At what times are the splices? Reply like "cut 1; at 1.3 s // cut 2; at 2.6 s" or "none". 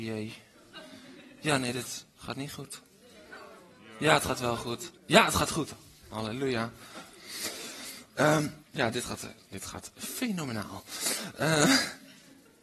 cut 1; at 5.0 s // cut 2; at 8.6 s